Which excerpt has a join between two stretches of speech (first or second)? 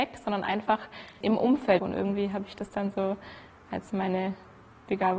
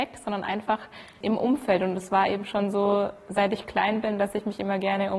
first